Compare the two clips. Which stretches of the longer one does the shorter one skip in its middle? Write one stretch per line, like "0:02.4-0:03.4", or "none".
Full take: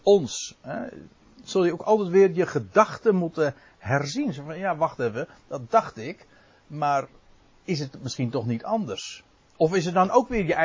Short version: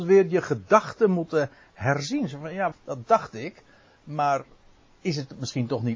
0:04.8-0:05.3